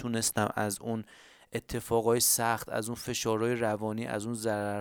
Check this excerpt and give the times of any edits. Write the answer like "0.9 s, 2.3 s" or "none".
none